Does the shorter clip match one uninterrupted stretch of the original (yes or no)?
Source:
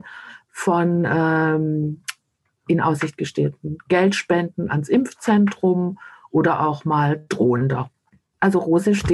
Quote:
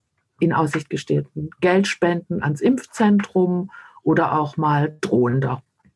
yes